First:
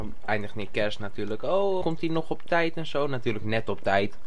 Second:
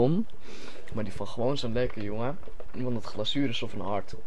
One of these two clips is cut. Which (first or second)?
first